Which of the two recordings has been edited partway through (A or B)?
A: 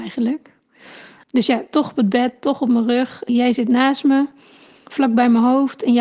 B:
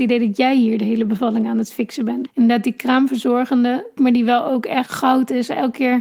B